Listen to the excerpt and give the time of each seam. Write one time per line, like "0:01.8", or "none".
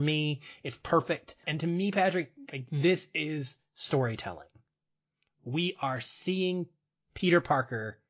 0:01.4

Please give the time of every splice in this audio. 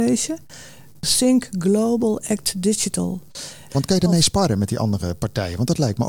0:01.0
0:03.7

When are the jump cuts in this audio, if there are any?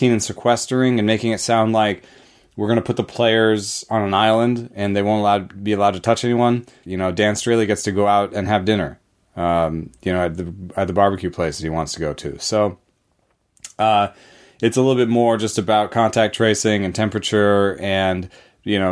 0:06.8

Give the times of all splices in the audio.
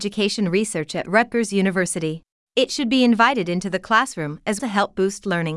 0:02.5
0:04.6

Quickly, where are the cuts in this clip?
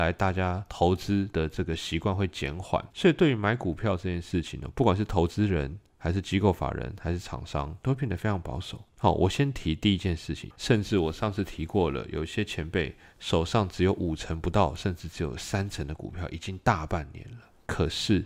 0:02.9
0:08.9
0:10.5

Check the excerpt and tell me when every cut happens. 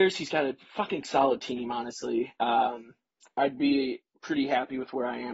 0:03.4

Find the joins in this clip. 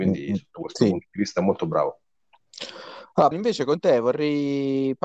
0:03.3

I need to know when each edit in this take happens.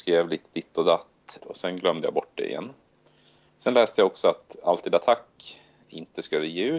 0:01.4

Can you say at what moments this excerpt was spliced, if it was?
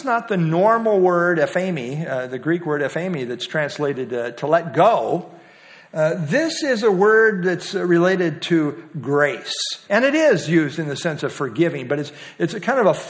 0:09.8

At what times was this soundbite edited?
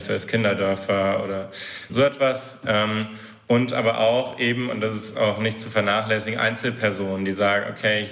0:01.9

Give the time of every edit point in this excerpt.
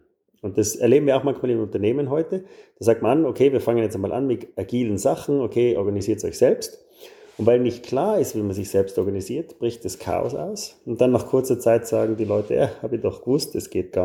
none

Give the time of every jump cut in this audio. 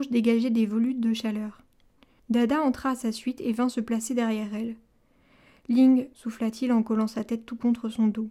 0:02.2
0:06.1

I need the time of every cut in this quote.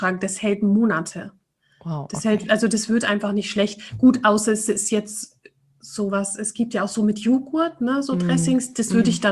none

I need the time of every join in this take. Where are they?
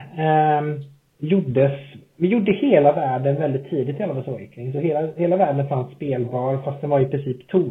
none

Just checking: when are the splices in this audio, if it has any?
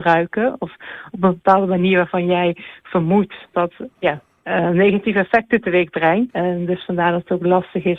0:03.5
0:06.3

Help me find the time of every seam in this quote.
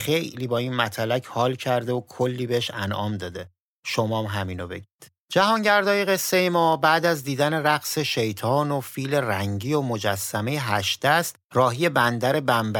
0:05.2
0:11.4

